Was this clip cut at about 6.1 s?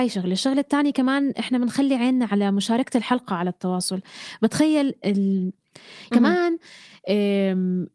yes; 1 cut; at 6.1 s

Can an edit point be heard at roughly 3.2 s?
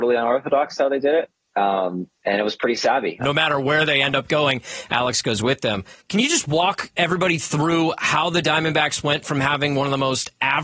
yes; 2 cuts; at 3.2 s, 6.0 s

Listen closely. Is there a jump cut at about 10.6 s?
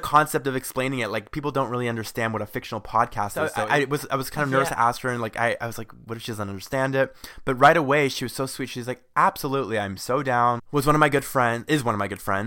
yes; 1 cut; at 10.6 s

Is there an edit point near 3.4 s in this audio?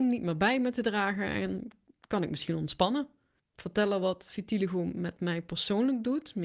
yes; 1 cut; at 3.4 s

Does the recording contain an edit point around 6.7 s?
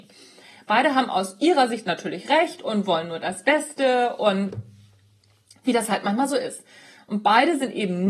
no; 0 cuts

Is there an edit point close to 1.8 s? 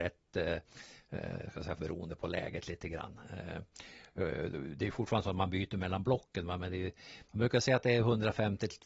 yes; 1 cut; at 1.8 s

